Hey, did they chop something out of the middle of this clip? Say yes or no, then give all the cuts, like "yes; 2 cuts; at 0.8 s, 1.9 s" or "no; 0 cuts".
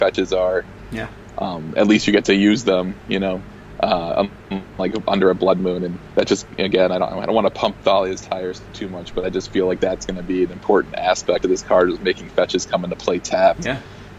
no; 0 cuts